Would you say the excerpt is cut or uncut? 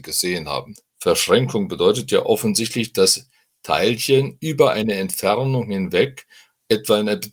uncut